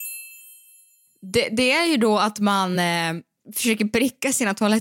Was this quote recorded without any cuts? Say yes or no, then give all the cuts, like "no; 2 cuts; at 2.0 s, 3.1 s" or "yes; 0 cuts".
yes; 0 cuts